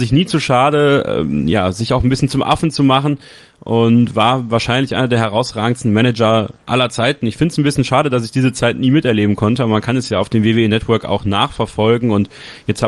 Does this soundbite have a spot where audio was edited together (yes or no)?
no